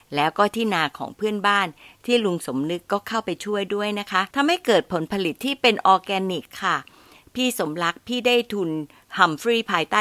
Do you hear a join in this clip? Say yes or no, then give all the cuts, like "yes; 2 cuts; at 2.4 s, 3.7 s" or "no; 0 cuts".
yes; 1 cut; at 4.3 s